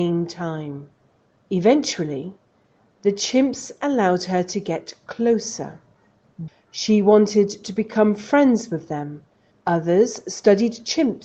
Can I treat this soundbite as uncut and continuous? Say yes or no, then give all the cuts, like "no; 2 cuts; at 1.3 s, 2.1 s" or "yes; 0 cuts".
no; 2 cuts; at 6.5 s, 9.5 s